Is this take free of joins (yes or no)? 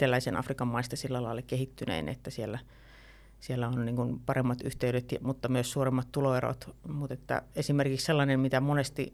yes